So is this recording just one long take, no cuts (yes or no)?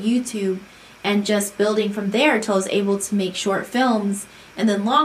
yes